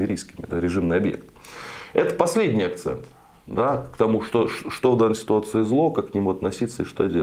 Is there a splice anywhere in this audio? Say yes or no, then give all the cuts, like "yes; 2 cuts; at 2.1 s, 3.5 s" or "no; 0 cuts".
no; 0 cuts